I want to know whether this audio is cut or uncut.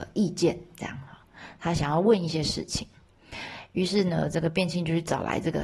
uncut